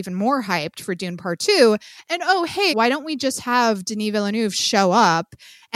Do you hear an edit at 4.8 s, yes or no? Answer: no